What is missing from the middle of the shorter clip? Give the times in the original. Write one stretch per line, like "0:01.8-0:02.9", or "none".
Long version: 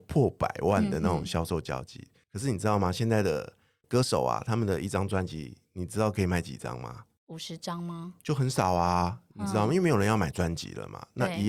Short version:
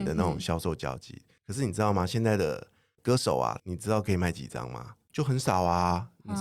0:04.4-0:05.7
0:07.2-0:08.2